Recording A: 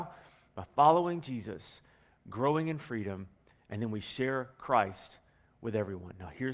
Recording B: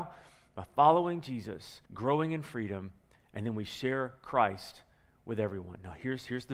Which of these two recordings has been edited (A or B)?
B